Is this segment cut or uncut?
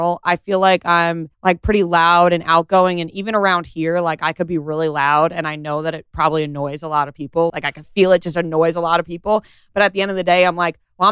cut